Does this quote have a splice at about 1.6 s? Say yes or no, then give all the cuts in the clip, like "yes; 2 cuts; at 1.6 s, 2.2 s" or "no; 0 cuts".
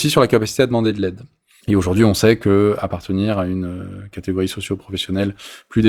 yes; 1 cut; at 1.6 s